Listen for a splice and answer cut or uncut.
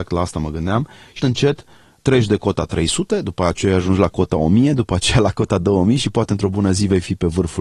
cut